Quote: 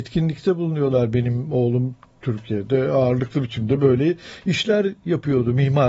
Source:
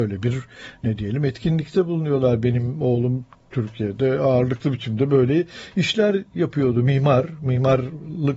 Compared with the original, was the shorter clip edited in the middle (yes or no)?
no